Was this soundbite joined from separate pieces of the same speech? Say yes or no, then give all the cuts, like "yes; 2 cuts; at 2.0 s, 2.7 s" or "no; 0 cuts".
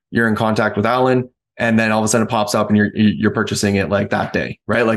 no; 0 cuts